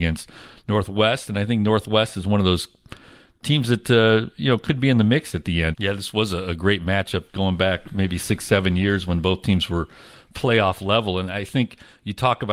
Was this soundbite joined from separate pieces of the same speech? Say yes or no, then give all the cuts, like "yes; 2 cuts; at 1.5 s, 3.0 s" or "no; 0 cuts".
yes; 1 cut; at 5.7 s